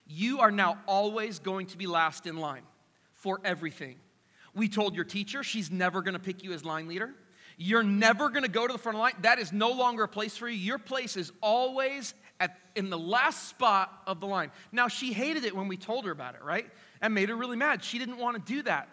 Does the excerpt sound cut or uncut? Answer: uncut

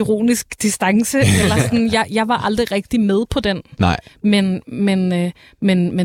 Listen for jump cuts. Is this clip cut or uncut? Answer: uncut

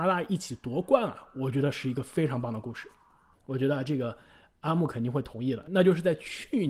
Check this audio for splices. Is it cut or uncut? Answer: cut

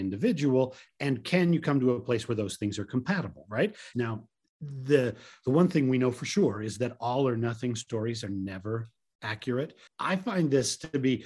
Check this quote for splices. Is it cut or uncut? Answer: cut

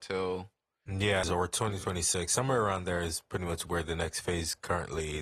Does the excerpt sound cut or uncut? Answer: cut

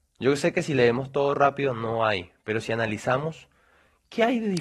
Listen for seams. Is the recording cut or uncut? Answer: uncut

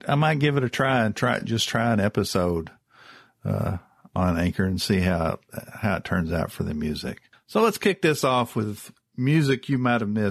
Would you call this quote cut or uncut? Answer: uncut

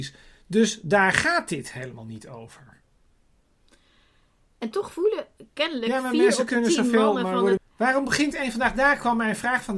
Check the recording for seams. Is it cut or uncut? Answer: cut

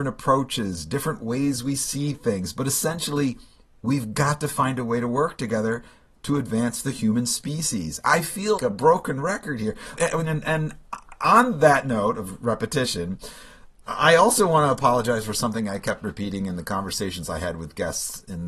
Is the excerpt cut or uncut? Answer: cut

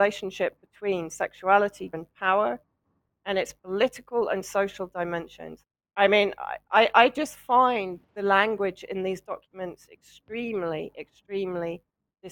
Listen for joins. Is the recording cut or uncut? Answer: cut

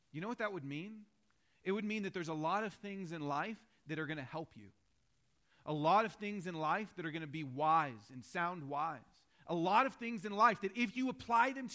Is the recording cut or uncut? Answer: uncut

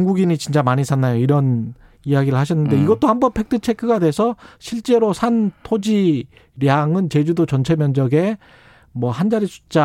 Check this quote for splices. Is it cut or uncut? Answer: uncut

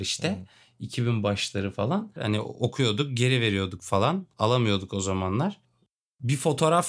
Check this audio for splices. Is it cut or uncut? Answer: cut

